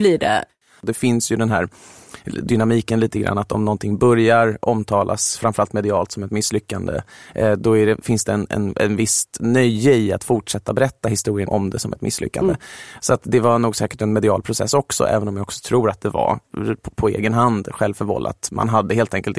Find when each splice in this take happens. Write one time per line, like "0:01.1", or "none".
0:11.5